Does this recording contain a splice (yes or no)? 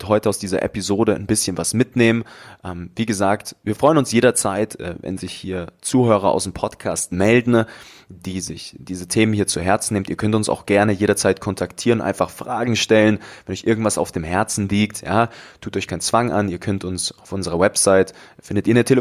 no